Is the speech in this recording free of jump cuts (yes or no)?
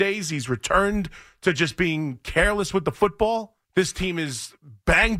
no